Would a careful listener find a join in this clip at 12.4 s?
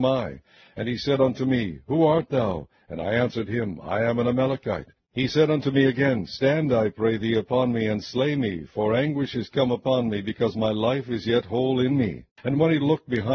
yes; 1 cut; at 12.4 s

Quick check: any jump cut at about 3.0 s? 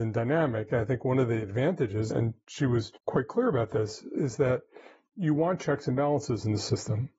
yes; 1 cut; at 3.0 s

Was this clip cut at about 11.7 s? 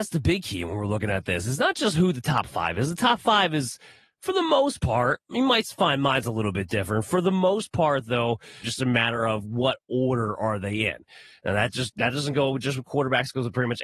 no; 1 cut; at 8.6 s

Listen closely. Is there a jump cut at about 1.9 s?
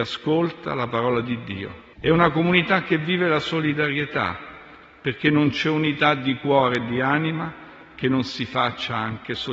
yes; 1 cut; at 1.9 s

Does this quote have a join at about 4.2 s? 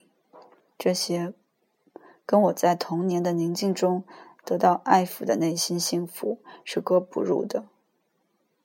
no; 1 cut; at 6.8 s

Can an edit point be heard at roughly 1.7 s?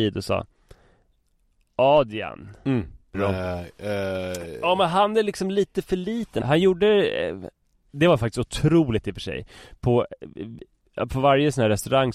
no; 2 cuts; at 3.1 s, 6.4 s

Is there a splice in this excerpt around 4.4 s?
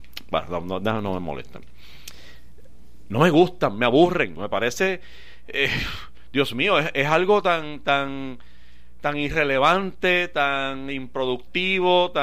yes; 1 cut; at 4.4 s

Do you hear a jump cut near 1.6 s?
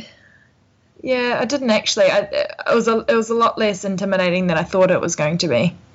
no; 0 cuts

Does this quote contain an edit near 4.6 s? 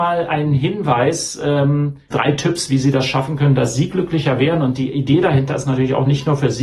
no; 1 cut; at 2.1 s

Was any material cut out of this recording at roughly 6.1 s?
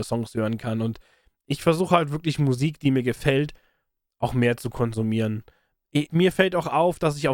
yes; 1 cut; at 6.1 s

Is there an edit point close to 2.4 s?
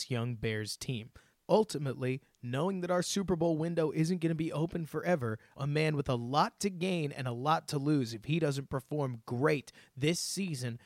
no; 1 cut; at 5.6 s

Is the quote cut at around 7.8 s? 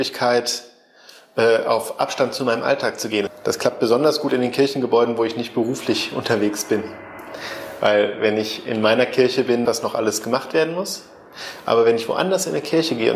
no; 2 cuts; at 3.3 s, 9.7 s

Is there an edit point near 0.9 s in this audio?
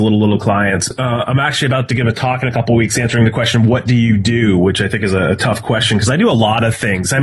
yes; 1 cut; at 0.9 s

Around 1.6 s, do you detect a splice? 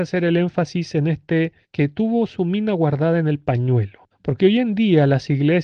yes; 2 cuts; at 1.6 s, 4.1 s

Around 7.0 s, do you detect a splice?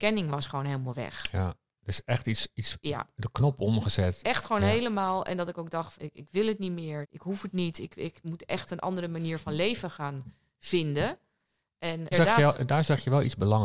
yes; 3 cuts; at 5.9 s, 7.0 s, 12.1 s

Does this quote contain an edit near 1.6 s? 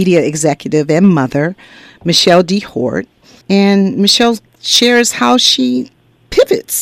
no; 1 cut; at 3.4 s

